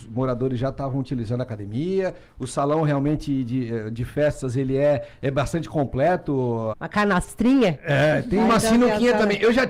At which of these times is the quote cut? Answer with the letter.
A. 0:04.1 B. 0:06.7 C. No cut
B